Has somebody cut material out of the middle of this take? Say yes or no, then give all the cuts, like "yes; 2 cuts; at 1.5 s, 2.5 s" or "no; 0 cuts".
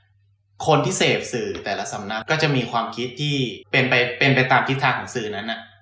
yes; 2 cuts; at 2.2 s, 3.6 s